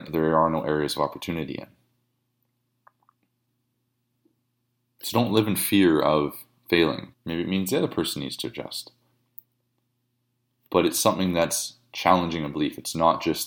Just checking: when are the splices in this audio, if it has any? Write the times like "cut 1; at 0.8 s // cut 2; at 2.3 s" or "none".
cut 1; at 7.1 s

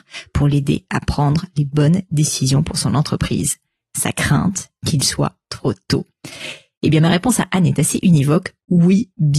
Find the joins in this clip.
none

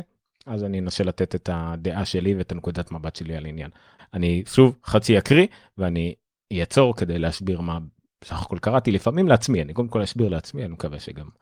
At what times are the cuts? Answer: cut 1; at 4.0 s

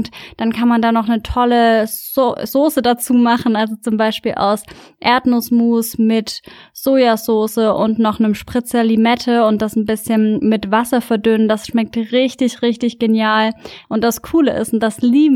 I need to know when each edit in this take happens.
cut 1; at 13.8 s

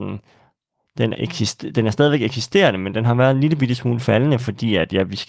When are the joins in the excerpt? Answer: cut 1; at 1.1 s

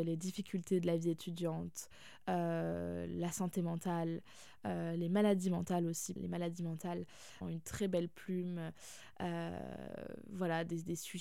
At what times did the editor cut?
cut 1; at 6.2 s // cut 2; at 7.4 s

